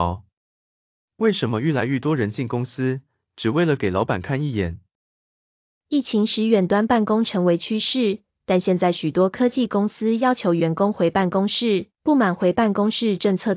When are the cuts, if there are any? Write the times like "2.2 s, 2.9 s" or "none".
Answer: 11.9 s